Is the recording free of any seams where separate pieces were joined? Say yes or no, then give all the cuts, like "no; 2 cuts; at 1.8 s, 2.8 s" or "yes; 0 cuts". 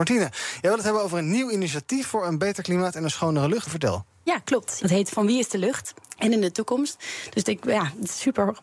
no; 3 cuts; at 3.6 s, 4.8 s, 6.2 s